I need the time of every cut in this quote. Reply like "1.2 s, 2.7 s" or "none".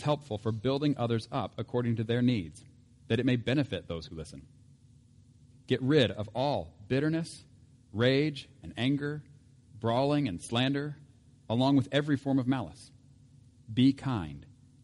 5.5 s